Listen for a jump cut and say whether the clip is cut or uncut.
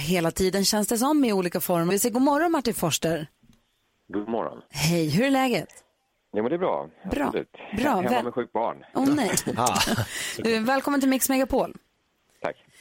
cut